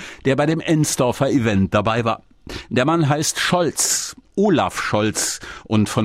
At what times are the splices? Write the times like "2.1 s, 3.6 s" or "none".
none